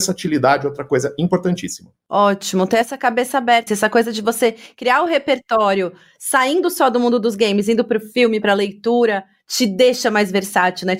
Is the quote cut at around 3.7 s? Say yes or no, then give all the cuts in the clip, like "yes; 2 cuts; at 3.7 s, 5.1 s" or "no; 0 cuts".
yes; 2 cuts; at 3.7 s, 8.4 s